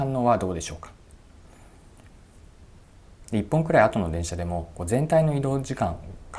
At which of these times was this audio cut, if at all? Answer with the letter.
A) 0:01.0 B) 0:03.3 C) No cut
B